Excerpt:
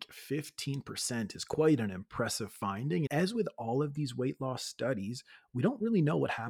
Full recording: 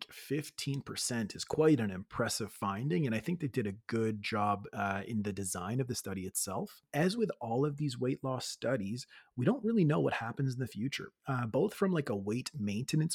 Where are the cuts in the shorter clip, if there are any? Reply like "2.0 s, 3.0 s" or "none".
3.1 s